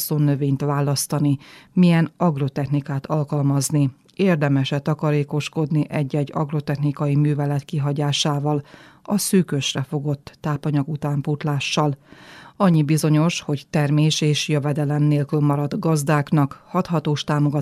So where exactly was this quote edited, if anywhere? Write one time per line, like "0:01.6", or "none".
none

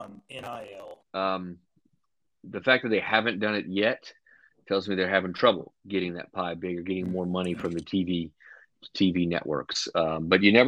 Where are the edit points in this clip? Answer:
0:01.0

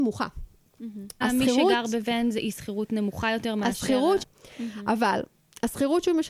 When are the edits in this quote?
0:01.2
0:04.2

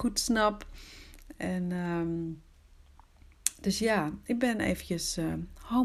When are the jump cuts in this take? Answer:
none

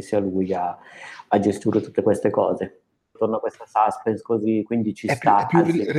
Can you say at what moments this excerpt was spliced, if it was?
0:03.2

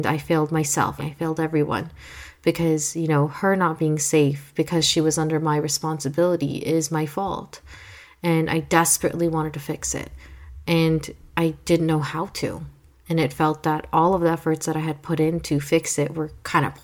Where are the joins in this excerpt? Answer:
0:01.0

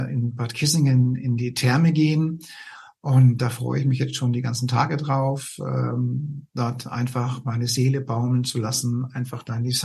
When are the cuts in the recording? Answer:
none

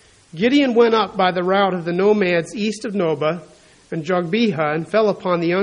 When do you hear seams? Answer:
none

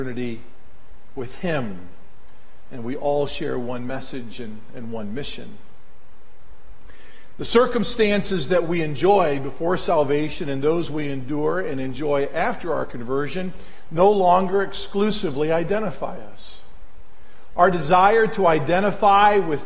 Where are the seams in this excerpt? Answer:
none

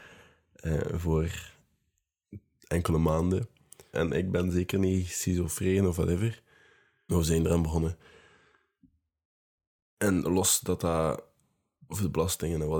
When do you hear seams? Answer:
0:03.9
0:07.1

